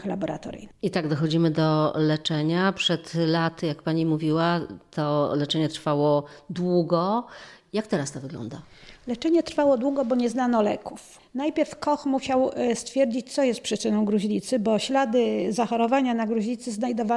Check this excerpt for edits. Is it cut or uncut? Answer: uncut